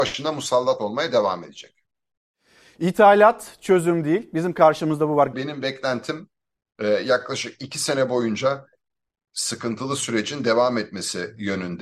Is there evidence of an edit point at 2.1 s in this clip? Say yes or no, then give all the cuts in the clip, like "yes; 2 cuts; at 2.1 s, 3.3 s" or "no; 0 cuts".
no; 1 cut; at 5.3 s